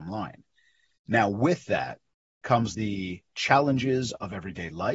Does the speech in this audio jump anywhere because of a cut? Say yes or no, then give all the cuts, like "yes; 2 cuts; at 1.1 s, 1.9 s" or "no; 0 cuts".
no; 0 cuts